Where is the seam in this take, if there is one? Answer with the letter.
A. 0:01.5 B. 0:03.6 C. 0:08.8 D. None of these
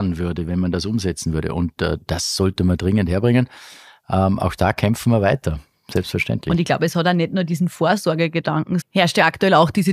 C